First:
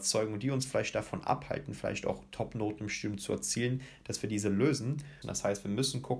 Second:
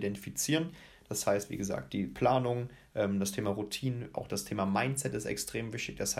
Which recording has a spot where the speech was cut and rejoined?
first; 1 cut; at 5.2 s

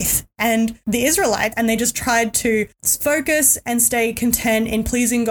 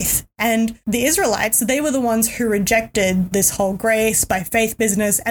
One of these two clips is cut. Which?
first; 1 cut; at 1.5 s

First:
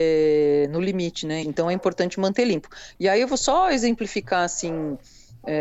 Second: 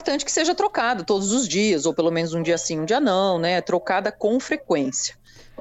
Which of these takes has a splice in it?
first; 1 cut; at 1.4 s

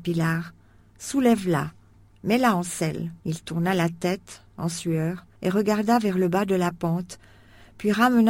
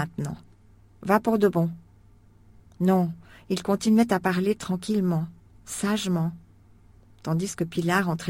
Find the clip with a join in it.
first; 2 cuts; at 3.2 s, 5.4 s

